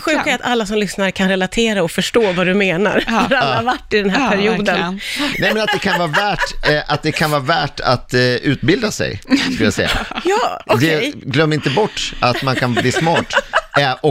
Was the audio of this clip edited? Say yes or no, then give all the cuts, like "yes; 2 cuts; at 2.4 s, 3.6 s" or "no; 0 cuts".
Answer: yes; 1 cut; at 5.3 s